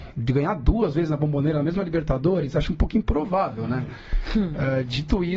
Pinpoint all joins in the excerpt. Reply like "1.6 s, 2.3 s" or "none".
none